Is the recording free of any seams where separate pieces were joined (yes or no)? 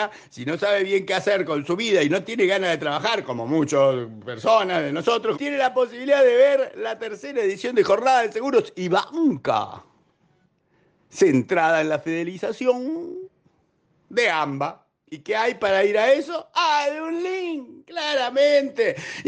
no